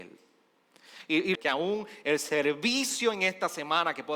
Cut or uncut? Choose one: cut